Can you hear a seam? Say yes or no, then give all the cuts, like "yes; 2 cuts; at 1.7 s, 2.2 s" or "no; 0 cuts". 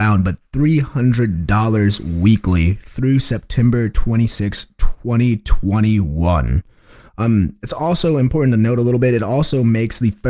no; 0 cuts